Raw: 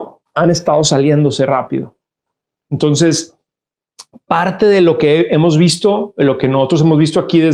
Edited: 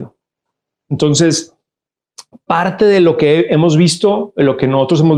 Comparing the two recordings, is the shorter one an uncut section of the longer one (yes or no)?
yes